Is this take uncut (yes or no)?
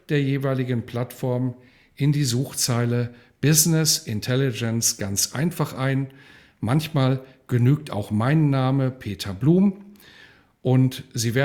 yes